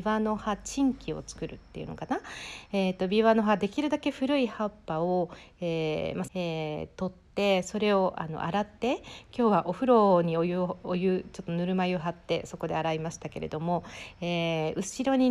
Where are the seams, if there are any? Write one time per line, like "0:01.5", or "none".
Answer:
0:06.3